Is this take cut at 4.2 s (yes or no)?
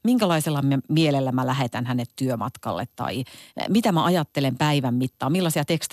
no